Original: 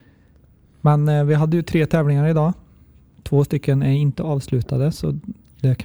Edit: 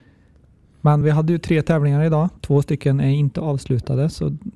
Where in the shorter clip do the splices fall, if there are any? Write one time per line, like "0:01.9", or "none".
0:01.0
0:02.4